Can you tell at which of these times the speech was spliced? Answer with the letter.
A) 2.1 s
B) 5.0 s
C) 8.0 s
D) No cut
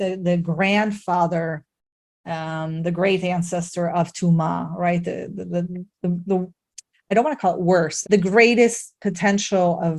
C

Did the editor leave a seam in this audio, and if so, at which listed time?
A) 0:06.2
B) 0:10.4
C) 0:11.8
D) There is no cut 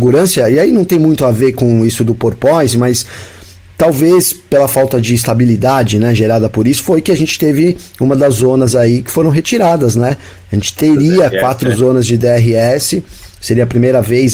D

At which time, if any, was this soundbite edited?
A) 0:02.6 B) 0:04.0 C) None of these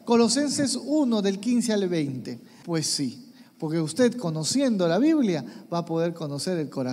A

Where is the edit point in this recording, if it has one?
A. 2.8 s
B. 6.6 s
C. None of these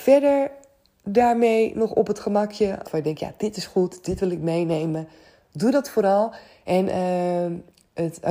A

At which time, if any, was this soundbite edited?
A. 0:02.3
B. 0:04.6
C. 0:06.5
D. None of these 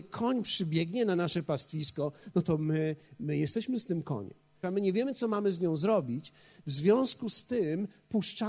B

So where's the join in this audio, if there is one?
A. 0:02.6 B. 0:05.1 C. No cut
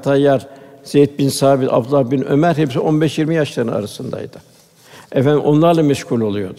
C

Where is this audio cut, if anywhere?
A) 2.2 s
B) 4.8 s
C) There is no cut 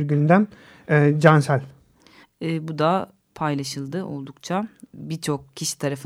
A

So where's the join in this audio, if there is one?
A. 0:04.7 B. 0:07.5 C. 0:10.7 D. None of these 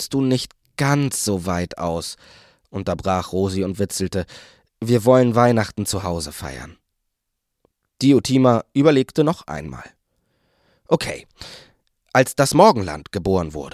D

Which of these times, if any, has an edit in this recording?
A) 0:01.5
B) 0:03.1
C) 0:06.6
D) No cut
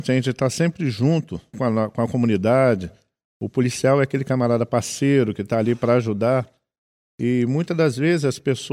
A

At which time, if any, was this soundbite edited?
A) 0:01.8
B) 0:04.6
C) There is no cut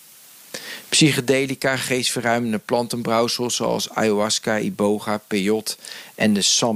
C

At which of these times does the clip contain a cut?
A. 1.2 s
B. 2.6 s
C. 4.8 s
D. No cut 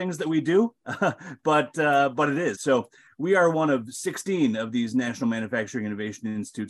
B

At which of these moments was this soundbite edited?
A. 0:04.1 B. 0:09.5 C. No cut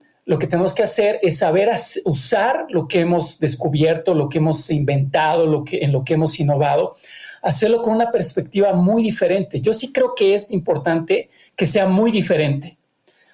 C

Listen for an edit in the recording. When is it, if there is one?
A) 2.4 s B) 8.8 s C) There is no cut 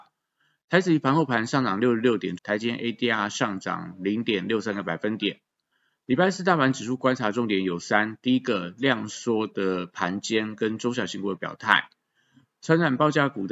A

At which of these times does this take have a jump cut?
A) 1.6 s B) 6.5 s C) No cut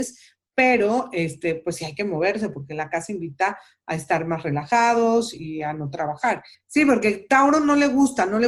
B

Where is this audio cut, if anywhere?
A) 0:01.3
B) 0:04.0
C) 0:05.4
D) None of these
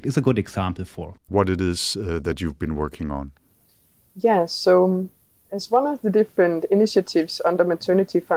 A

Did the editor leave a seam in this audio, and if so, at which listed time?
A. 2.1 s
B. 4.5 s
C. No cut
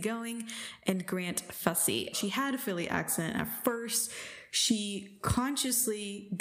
A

